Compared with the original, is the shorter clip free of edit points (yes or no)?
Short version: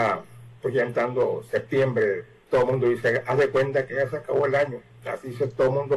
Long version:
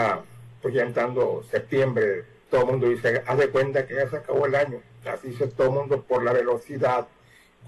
yes